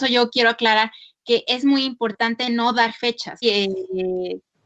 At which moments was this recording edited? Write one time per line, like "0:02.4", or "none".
0:03.4